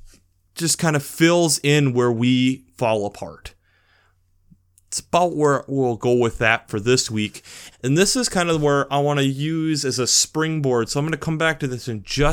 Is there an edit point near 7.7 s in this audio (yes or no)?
yes